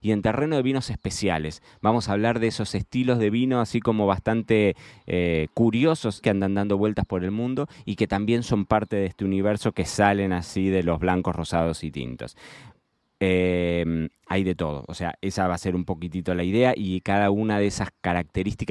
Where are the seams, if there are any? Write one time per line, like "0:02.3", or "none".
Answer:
0:06.2